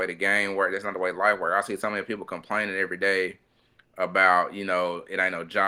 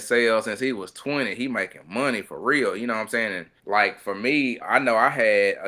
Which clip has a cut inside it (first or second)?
second